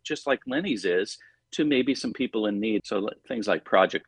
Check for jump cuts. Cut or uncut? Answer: cut